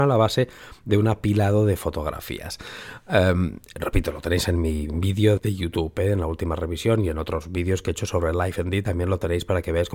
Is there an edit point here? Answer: yes; 1 cut; at 5.4 s

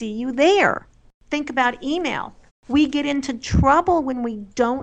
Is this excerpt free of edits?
no; 2 cuts; at 1.1 s, 2.5 s

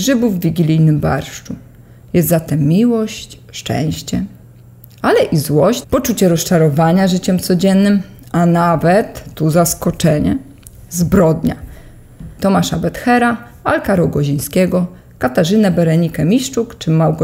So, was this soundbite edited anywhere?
yes; 2 cuts; at 5.8 s, 12.4 s

